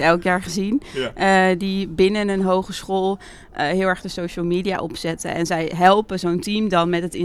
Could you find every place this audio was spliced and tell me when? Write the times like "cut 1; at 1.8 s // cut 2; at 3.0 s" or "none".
none